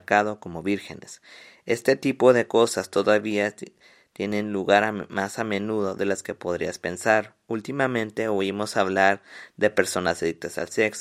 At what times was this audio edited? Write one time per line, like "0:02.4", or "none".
none